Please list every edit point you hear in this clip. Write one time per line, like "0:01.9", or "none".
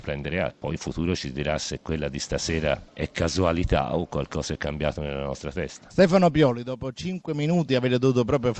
none